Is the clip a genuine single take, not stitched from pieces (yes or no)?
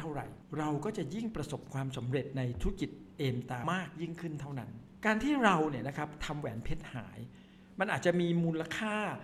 no